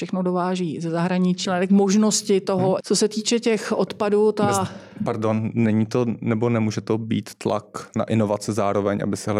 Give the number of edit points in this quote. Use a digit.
2